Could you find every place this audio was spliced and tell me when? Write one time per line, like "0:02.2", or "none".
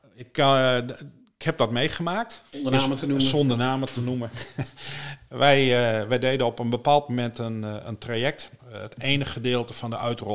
0:02.5
0:08.6